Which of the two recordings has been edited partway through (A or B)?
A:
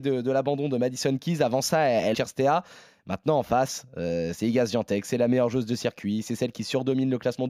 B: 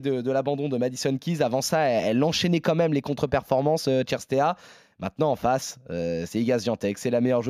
A